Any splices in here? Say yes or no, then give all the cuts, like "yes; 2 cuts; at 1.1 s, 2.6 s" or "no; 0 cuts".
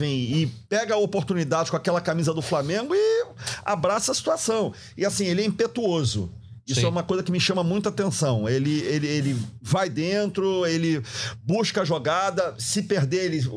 no; 0 cuts